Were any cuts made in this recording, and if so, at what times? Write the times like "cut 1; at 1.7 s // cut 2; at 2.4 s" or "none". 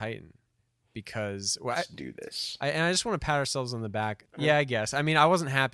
cut 1; at 1.7 s // cut 2; at 4.2 s